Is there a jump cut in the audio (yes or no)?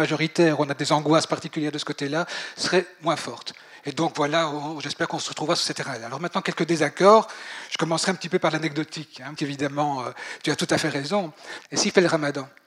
yes